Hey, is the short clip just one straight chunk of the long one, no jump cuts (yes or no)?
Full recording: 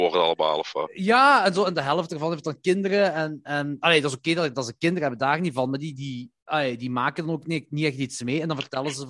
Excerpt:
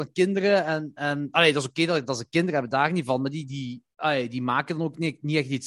yes